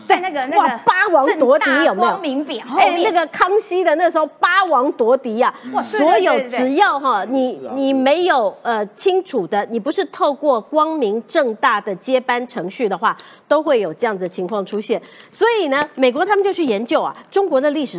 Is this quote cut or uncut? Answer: uncut